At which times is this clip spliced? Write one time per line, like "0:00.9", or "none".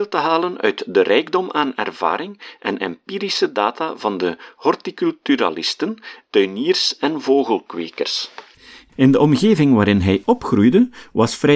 0:06.2
0:08.9